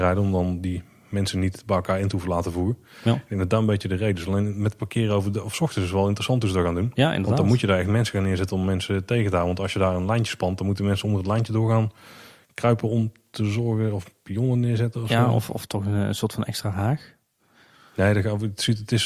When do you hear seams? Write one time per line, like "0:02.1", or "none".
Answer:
none